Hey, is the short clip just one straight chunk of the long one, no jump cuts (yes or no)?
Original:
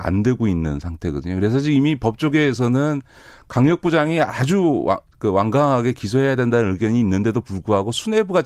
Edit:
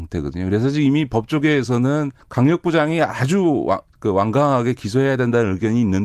no